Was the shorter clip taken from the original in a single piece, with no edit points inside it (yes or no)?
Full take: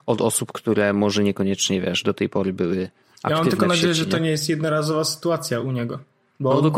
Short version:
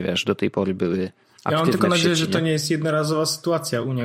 yes